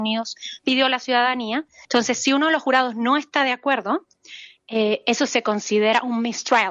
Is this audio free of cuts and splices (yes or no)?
no